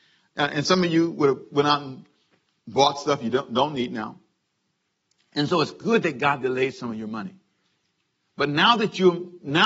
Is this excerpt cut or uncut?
uncut